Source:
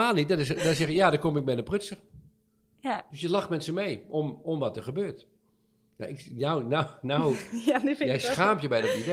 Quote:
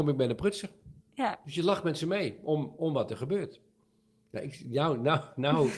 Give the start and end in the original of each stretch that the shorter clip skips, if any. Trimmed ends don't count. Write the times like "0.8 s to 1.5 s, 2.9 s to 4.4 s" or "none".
2.3 s to 2.7 s